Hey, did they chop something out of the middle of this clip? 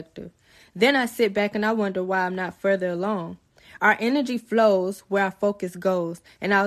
no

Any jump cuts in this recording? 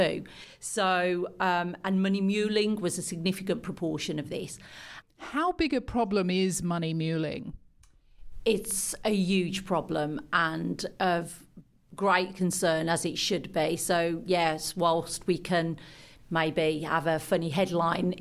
yes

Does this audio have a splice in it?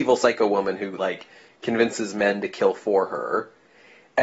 no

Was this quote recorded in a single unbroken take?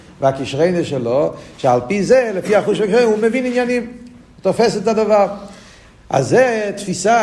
yes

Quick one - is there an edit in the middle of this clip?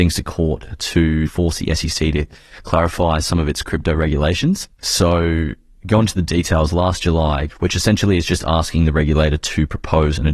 yes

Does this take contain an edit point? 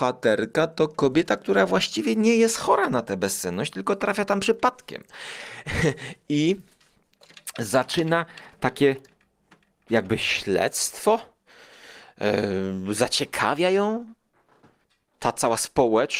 no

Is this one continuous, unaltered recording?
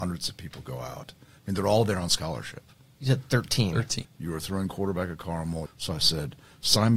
no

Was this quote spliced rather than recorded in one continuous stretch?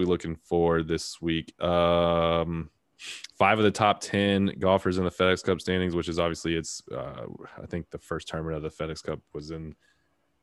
no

